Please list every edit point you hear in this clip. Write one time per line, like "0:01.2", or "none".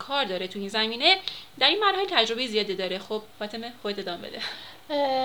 0:03.3